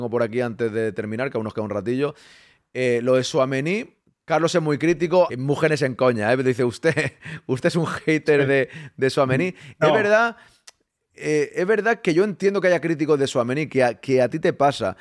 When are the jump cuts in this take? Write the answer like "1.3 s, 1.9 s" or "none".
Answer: 5.3 s